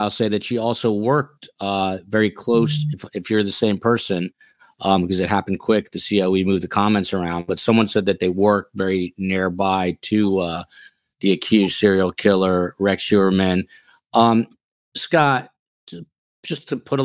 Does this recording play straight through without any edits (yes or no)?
yes